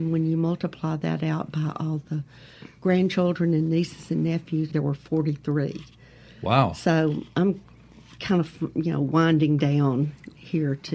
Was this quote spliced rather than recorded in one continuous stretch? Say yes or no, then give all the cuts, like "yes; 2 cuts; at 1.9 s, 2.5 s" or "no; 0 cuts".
yes; 1 cut; at 4.7 s